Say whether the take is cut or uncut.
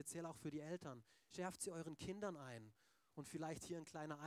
uncut